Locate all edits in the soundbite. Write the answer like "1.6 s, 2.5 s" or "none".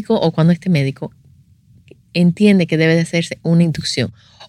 none